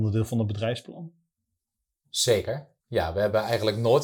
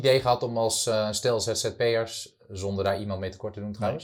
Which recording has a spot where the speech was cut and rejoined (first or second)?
first